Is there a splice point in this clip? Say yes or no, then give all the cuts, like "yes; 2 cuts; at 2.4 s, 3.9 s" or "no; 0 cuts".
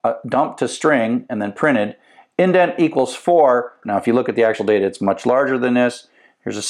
yes; 1 cut; at 3.8 s